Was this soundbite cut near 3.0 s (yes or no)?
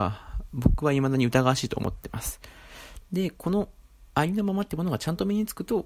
yes